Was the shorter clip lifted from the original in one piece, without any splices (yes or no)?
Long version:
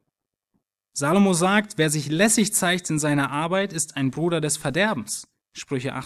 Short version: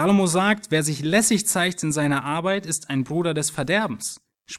yes